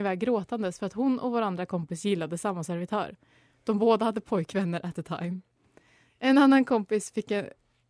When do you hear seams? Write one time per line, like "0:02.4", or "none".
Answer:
none